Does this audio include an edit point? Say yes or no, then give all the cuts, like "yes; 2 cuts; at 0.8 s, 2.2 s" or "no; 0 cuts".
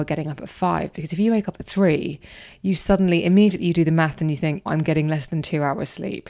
yes; 1 cut; at 4.7 s